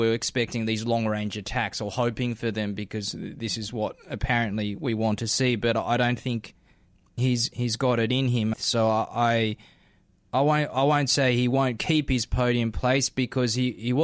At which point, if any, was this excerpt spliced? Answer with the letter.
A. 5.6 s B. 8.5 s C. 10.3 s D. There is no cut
B